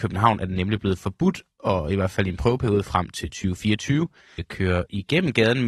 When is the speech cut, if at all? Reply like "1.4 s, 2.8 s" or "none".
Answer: 4.4 s

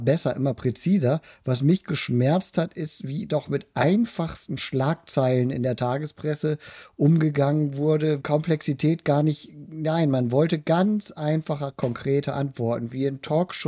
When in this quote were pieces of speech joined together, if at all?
8.2 s

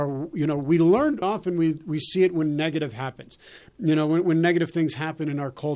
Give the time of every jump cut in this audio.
1.2 s

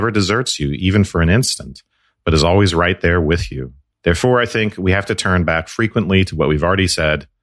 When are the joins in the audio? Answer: none

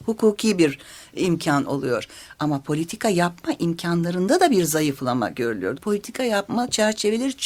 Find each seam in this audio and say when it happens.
5.8 s

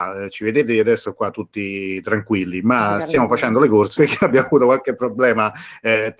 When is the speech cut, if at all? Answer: 4.0 s

